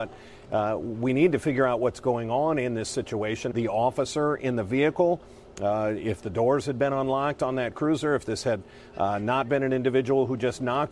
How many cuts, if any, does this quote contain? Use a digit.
1